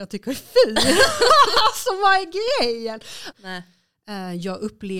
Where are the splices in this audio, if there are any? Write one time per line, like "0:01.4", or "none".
0:03.3